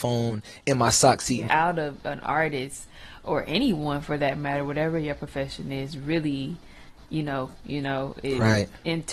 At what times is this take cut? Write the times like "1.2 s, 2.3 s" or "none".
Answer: 1.5 s, 7.5 s

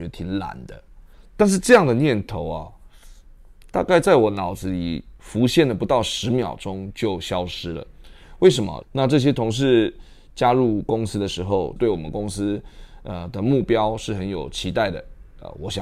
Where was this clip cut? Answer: 8.8 s, 11.8 s

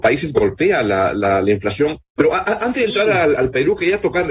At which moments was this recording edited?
2.2 s, 3.4 s

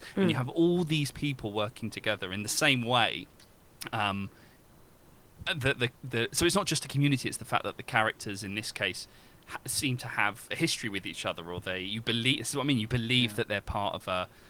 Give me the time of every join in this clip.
none

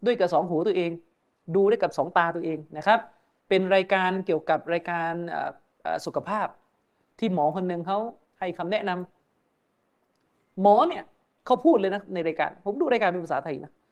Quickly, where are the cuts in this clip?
none

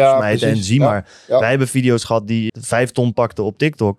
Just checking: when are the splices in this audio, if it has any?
2.5 s

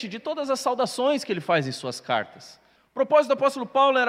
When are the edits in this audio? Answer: 2.8 s

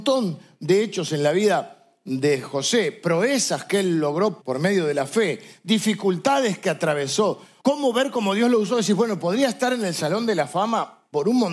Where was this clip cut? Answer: 4.4 s, 7.6 s

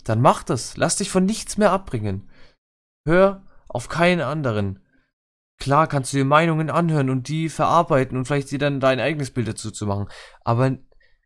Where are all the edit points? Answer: none

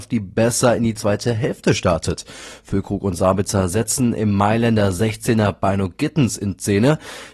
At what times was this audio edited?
none

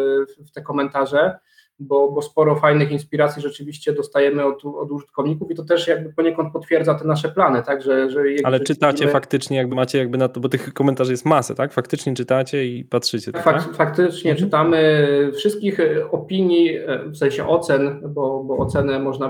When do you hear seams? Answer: 9.7 s, 13.3 s

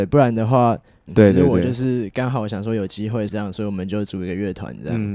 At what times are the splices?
1.1 s, 3.3 s

